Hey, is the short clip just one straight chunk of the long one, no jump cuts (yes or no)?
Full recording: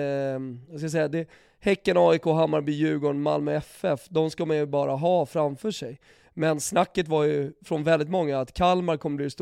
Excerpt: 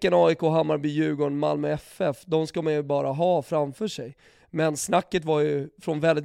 yes